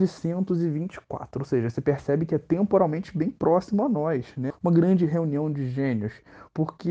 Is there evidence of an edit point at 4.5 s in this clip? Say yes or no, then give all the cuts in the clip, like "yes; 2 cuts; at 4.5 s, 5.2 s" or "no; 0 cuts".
yes; 1 cut; at 4.5 s